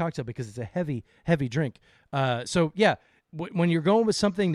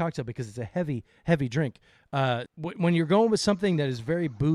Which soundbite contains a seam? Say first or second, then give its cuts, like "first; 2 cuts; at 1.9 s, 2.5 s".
second; 1 cut; at 2.5 s